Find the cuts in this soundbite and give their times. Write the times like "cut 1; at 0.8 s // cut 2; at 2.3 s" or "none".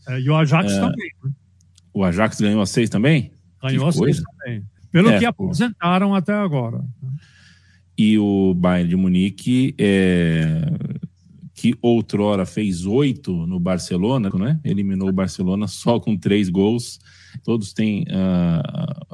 cut 1; at 4.8 s // cut 2; at 14.3 s // cut 3; at 17.4 s